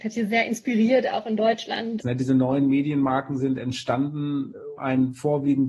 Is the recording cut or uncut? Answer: cut